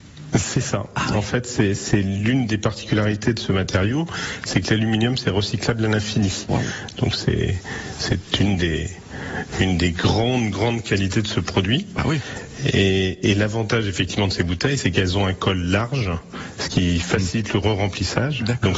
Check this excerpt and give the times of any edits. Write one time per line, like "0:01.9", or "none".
none